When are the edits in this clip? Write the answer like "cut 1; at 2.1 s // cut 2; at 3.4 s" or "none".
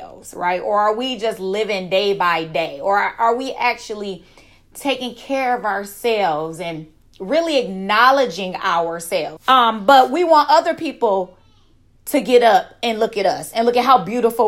cut 1; at 9.4 s